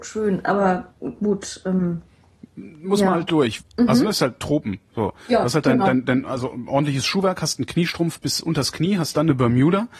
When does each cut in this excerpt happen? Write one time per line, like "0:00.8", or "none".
0:03.6